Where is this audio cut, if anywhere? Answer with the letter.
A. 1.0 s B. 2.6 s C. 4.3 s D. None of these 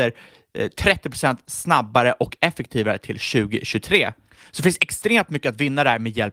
D